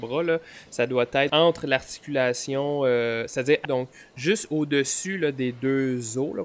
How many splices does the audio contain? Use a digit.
2